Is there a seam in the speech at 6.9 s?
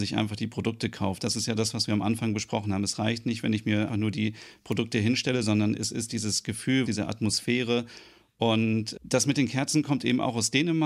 yes; 2 cuts; at 3.9 s, 6.9 s

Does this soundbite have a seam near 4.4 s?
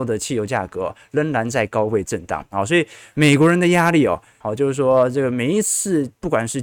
yes; 1 cut; at 4.4 s

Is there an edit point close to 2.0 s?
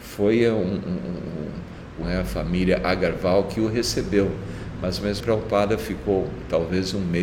yes; 2 cuts; at 2.0 s, 5.2 s

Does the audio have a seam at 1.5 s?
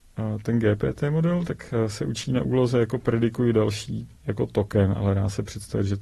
no; 1 cut; at 4.2 s

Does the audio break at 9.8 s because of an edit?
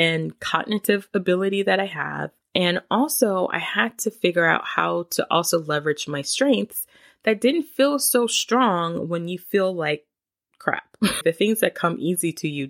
no; 1 cut; at 11.2 s

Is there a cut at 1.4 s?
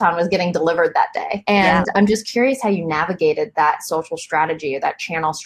no; 0 cuts

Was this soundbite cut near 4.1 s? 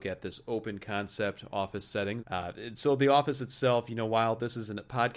no; 1 cut; at 2.2 s

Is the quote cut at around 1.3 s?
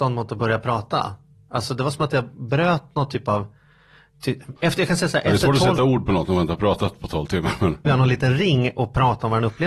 no; 2 cuts; at 4.6 s, 7.9 s

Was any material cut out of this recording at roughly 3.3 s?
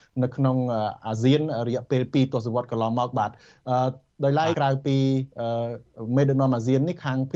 no; 1 cut; at 4.5 s

